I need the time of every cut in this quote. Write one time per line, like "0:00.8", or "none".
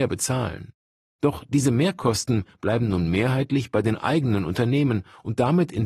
none